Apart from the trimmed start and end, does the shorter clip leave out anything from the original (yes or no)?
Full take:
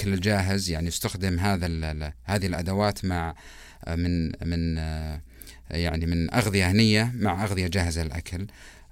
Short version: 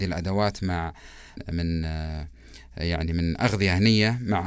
yes